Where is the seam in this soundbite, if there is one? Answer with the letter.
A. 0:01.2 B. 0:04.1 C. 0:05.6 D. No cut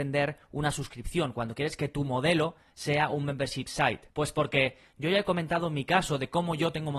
B